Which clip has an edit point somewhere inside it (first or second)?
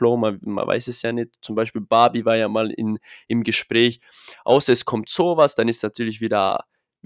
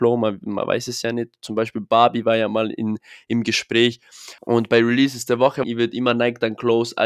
second